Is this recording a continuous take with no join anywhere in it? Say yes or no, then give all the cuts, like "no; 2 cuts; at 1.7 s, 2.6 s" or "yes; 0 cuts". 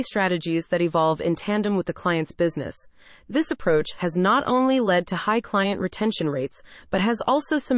yes; 0 cuts